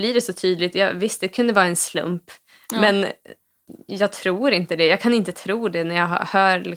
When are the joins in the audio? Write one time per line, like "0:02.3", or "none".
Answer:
none

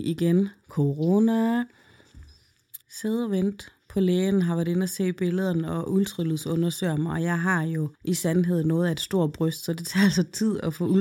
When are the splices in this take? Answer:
0:02.8
0:08.0

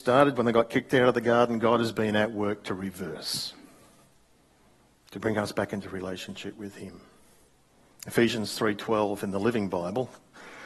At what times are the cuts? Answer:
none

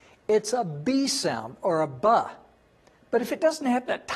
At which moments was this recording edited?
none

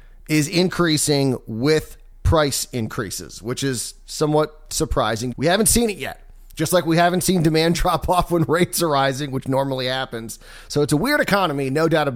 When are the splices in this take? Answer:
0:05.3

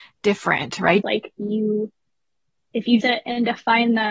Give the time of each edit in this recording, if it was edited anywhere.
0:01.0
0:03.0

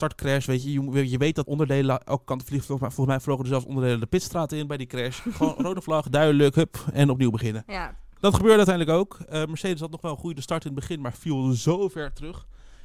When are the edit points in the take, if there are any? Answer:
0:01.4

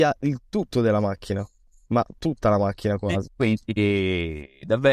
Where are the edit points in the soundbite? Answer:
0:03.2

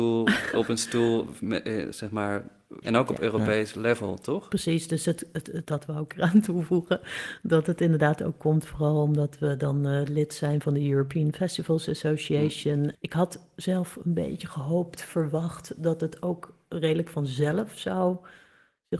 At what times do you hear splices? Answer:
0:02.8
0:05.7
0:12.9

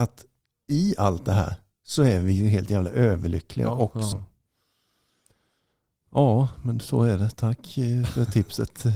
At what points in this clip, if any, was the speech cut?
0:04.1

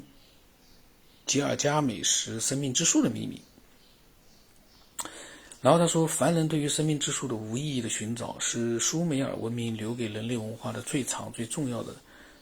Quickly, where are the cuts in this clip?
none

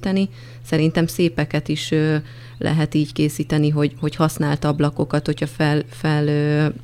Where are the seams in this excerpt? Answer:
none

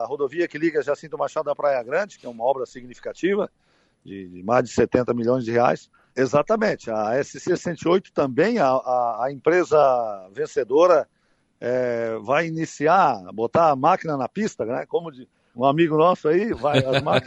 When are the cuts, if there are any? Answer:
0:06.1
0:15.5

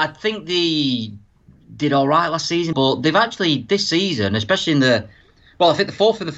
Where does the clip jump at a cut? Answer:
0:02.7

